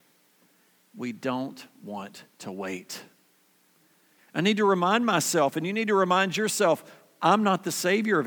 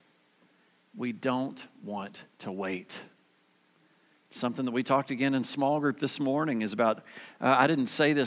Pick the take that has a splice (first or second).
first